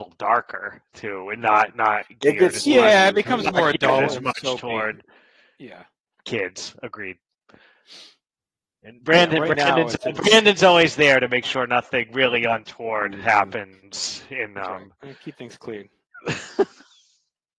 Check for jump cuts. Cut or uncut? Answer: uncut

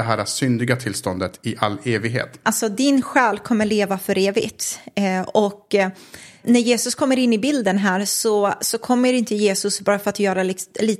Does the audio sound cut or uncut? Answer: cut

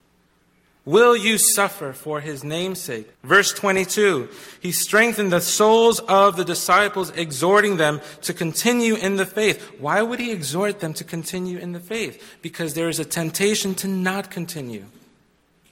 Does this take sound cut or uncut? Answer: cut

